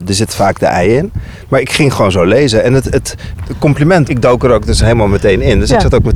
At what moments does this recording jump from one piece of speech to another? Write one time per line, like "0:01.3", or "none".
0:04.1